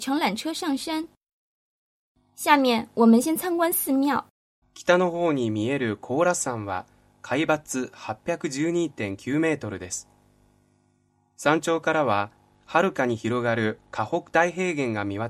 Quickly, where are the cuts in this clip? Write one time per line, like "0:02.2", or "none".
0:04.6